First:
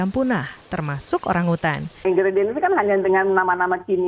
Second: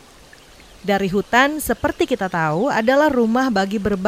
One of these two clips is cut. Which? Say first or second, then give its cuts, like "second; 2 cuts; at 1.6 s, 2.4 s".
first; 1 cut; at 2.0 s